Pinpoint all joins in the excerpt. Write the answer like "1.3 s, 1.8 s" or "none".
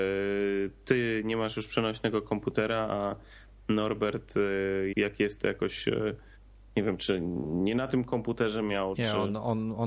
4.9 s